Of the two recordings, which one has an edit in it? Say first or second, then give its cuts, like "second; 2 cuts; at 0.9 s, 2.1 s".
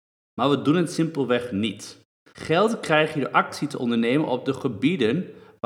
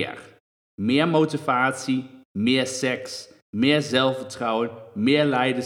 first; 1 cut; at 2.3 s